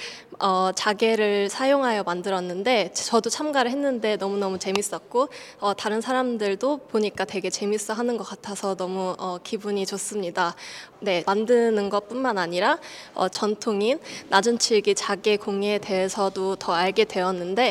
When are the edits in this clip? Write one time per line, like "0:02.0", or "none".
0:11.2
0:13.3